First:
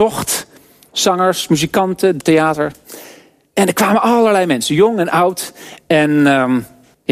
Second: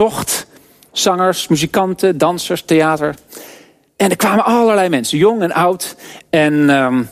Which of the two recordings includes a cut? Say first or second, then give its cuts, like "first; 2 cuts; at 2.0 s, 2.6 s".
first; 1 cut; at 2.2 s